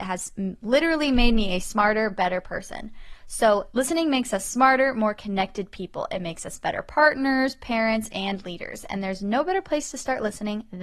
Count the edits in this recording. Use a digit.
0